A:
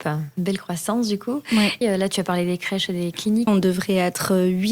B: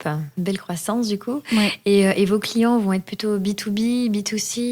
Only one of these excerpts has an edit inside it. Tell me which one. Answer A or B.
A